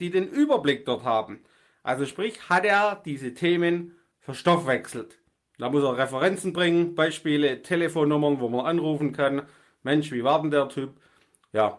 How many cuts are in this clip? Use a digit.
0